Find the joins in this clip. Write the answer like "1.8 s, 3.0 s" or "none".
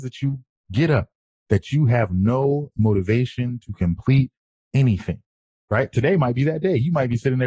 none